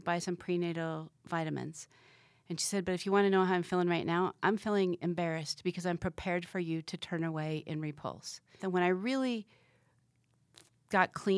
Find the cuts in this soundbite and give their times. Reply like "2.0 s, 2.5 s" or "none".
8.6 s